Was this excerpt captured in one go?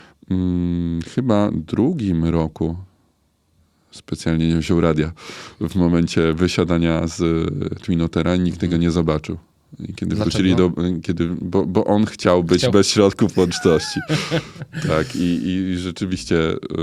yes; 0 cuts

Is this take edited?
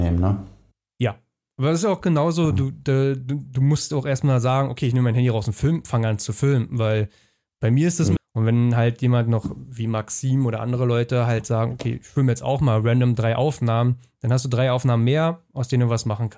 yes; 1 cut; at 8.2 s

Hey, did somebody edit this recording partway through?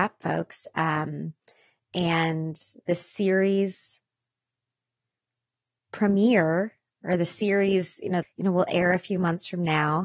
yes; 1 cut; at 8.2 s

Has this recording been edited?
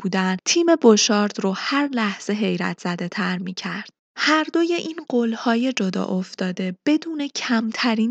no; 0 cuts

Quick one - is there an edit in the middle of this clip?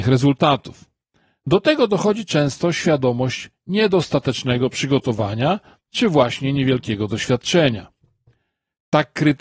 no; 0 cuts

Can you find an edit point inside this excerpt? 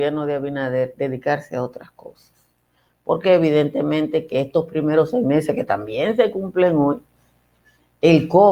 no; 0 cuts

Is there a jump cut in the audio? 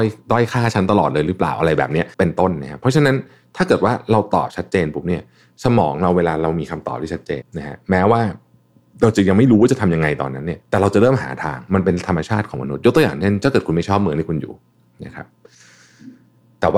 yes; 3 cuts; at 2.1 s, 7.4 s, 10.6 s

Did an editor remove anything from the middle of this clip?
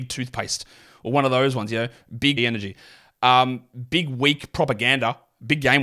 yes; 1 cut; at 2.4 s

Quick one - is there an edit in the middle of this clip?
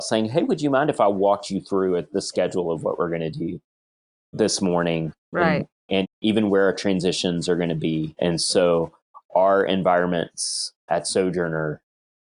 yes; 1 cut; at 6.0 s

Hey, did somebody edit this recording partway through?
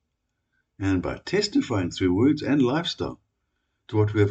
no; 0 cuts

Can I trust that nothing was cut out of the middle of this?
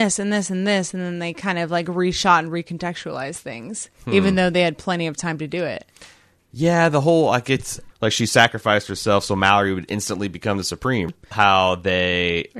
no; 2 cuts; at 7.9 s, 11.3 s

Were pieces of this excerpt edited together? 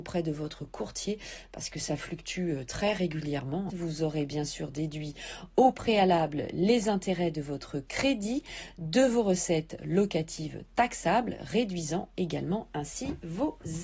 yes; 1 cut; at 3.7 s

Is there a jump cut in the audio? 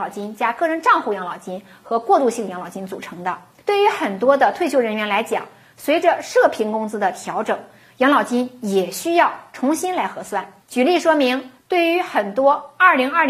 yes; 2 cuts; at 3.6 s, 11.6 s

